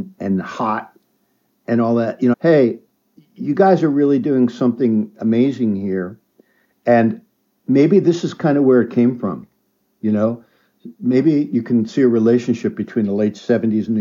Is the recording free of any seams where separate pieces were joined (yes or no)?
no